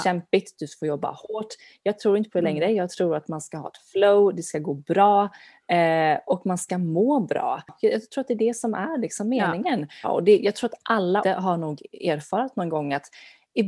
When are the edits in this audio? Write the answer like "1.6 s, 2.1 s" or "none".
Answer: 10.0 s, 11.2 s